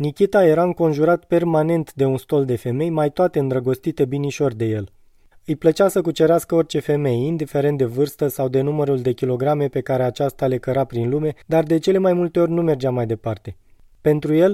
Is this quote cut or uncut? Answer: cut